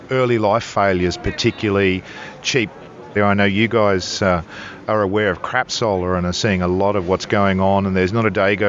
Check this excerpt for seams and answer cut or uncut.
cut